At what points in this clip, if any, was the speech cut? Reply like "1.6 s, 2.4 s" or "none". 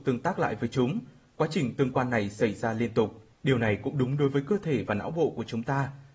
3.3 s